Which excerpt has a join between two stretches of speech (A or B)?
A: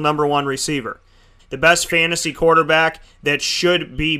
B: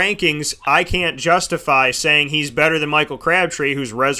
A